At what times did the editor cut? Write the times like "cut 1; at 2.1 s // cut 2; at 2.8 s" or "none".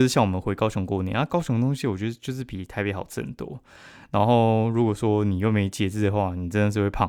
none

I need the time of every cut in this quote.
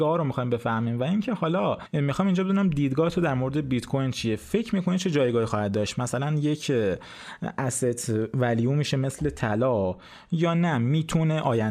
cut 1; at 1.9 s

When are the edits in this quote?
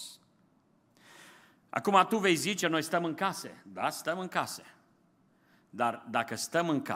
cut 1; at 2.6 s

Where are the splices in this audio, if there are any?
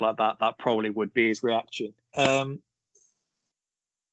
cut 1; at 2.1 s

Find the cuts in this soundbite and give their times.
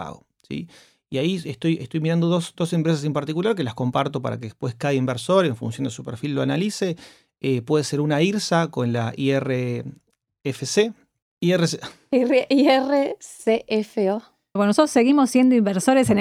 cut 1; at 11.2 s // cut 2; at 14.6 s

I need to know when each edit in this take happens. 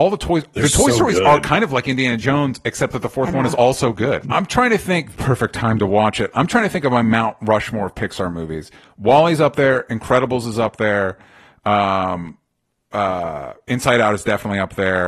cut 1; at 4.2 s

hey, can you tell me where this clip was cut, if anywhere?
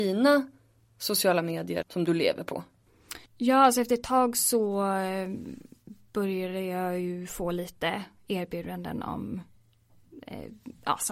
cut 1; at 1.8 s // cut 2; at 3.3 s

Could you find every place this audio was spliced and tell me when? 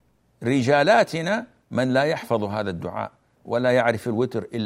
none

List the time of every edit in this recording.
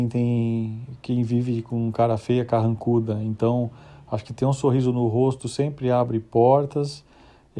none

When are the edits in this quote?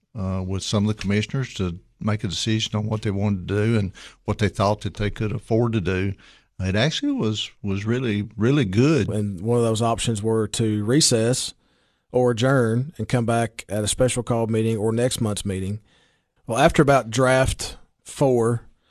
cut 1; at 9.1 s // cut 2; at 16.4 s

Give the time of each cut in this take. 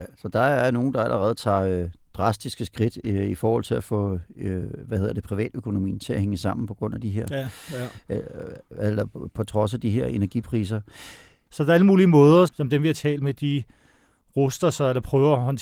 cut 1; at 11.5 s // cut 2; at 12.5 s

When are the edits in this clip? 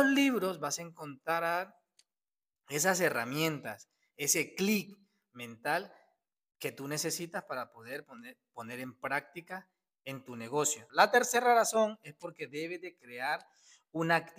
cut 1; at 10.9 s

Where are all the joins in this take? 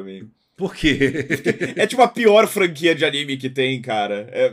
none

